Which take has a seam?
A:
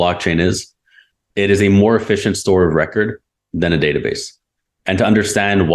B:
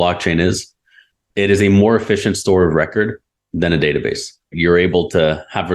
B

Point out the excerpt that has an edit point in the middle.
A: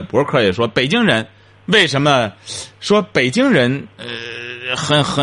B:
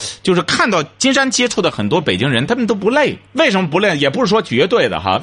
B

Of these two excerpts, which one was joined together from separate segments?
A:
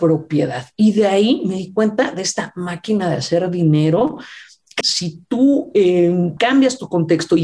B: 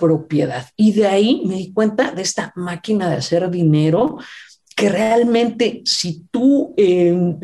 A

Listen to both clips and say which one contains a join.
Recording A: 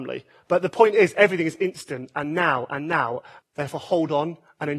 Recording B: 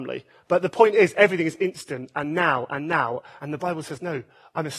A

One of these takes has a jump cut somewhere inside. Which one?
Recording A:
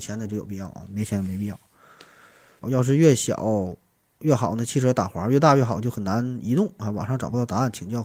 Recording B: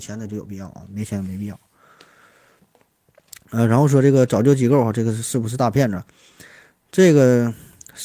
A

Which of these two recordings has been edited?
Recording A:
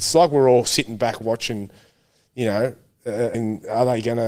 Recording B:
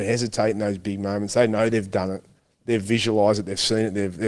A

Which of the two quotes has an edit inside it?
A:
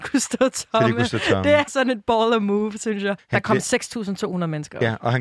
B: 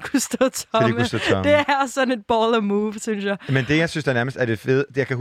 A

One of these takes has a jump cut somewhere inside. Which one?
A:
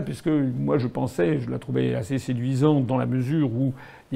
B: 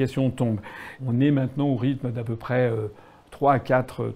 B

